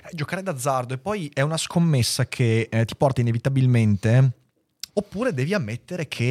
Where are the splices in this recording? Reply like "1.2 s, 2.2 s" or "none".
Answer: 4.9 s